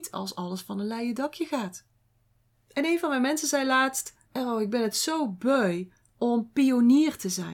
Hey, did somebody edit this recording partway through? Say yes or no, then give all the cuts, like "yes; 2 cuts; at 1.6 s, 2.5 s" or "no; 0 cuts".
yes; 2 cuts; at 2.5 s, 4.2 s